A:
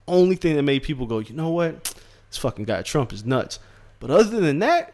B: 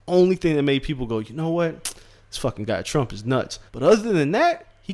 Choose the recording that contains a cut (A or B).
B